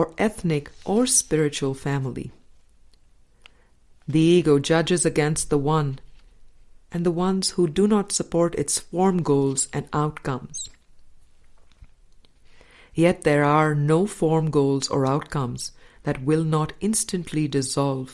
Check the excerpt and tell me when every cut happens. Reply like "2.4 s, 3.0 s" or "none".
none